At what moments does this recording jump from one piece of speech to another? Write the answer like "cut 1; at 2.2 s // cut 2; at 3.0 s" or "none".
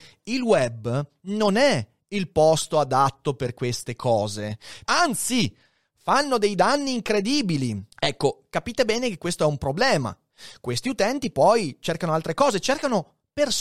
cut 1; at 4.9 s // cut 2; at 7.9 s